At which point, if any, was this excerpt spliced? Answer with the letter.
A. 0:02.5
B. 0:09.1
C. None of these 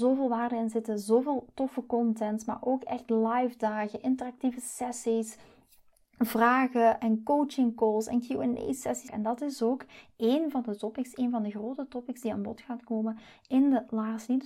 B